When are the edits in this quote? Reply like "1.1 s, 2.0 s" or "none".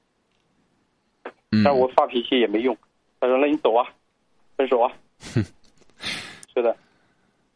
1.4 s, 6.4 s